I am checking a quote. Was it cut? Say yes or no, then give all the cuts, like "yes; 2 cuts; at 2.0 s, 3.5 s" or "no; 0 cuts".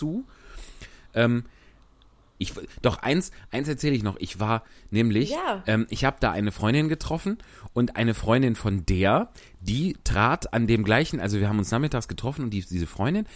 yes; 1 cut; at 2.4 s